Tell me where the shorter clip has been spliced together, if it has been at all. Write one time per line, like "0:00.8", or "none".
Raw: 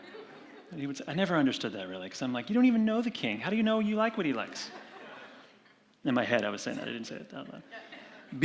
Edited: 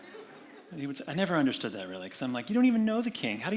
none